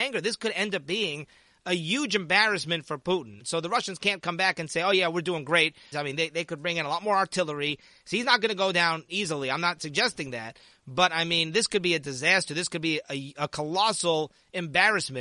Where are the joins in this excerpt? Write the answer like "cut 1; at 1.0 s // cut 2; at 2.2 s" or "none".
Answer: cut 1; at 3.4 s // cut 2; at 5.9 s

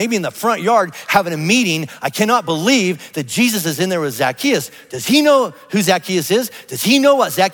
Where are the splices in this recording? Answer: none

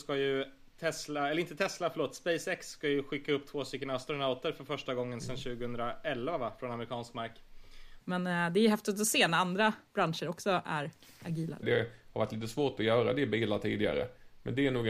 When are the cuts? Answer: cut 1; at 8.0 s // cut 2; at 11.6 s

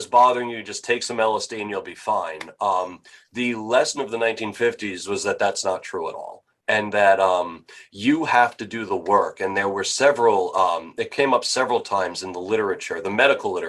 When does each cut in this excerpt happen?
none

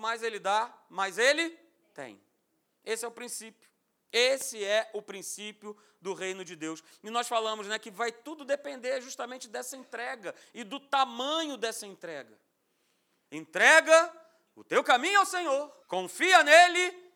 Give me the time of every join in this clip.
cut 1; at 13.3 s // cut 2; at 15.8 s

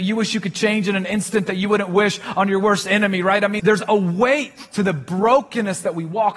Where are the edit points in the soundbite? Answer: cut 1; at 3.6 s

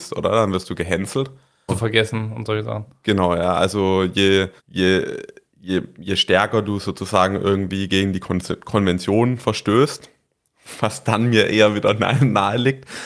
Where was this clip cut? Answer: cut 1; at 1.7 s // cut 2; at 4.6 s

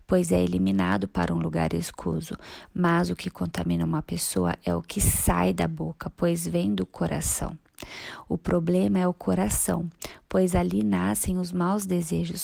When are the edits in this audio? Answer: none

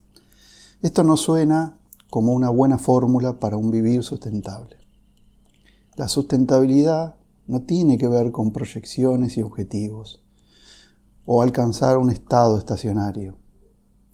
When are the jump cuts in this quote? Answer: none

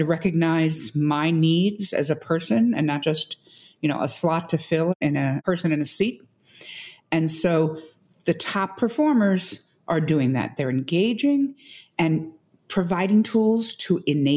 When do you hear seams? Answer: none

